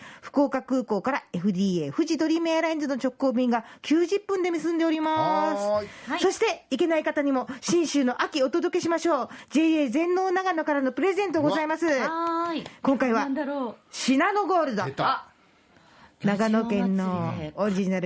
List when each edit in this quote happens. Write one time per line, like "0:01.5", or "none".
none